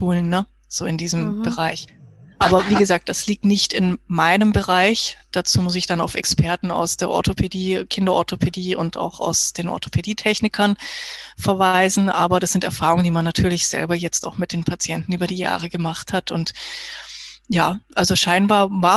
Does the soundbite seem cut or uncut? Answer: uncut